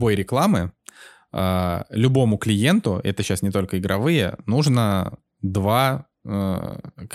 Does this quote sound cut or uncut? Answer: uncut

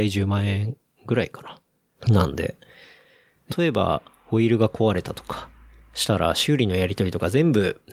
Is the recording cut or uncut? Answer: cut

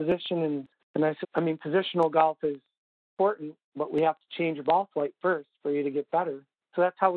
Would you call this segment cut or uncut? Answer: cut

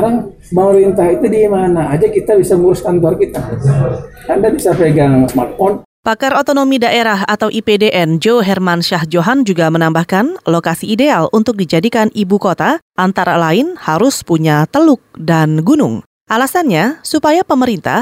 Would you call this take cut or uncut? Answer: cut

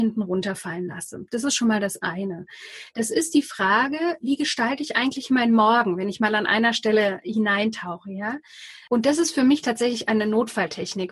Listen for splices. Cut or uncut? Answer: cut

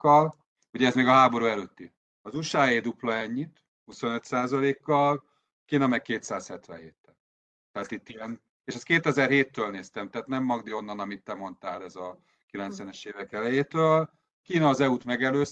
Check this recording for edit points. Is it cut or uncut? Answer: uncut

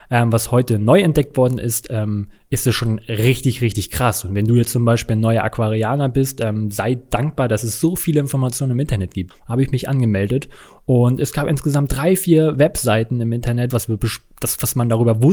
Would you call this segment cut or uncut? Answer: cut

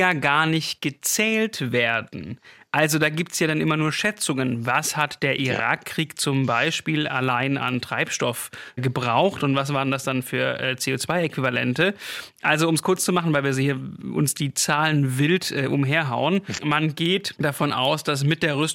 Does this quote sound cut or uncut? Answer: cut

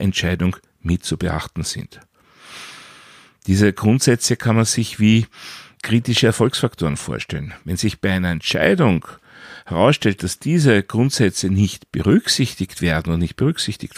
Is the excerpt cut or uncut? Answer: cut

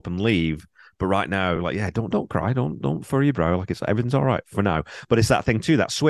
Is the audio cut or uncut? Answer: uncut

